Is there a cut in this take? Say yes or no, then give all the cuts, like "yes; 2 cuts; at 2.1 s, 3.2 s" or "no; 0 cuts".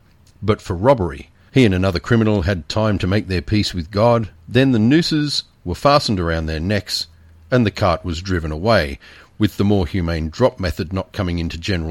yes; 1 cut; at 1.5 s